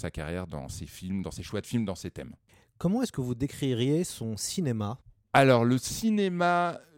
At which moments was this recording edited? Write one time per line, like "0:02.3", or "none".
none